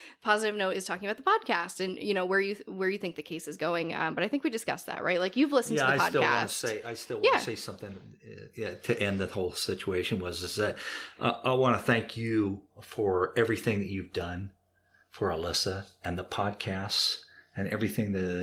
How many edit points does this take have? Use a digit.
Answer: 1